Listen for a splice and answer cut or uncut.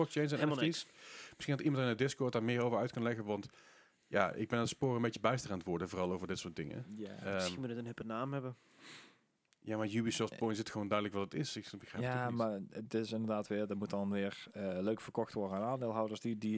uncut